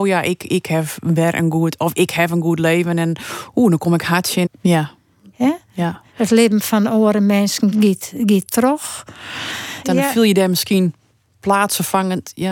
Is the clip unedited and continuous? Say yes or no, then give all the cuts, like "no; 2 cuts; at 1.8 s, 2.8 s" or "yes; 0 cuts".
no; 3 cuts; at 4.5 s, 7.7 s, 9.8 s